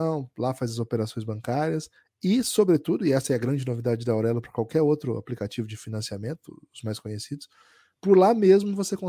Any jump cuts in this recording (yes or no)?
no